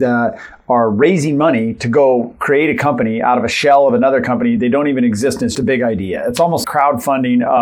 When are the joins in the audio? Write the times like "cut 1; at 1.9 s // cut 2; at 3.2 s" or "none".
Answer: cut 1; at 5.5 s // cut 2; at 6.6 s